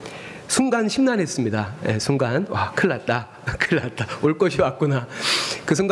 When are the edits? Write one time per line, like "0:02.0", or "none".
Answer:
none